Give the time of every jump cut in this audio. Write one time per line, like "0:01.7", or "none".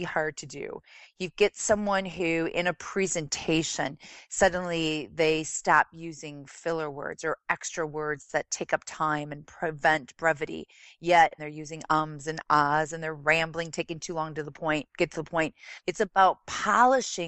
0:11.4
0:15.8